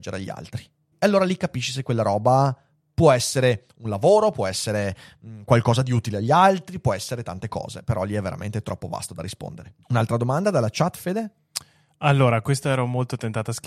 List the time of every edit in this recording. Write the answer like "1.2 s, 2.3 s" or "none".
0.9 s, 9.8 s